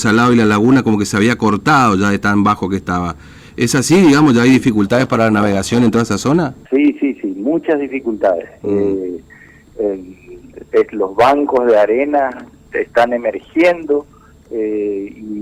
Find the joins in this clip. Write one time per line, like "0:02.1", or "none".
0:06.6
0:12.7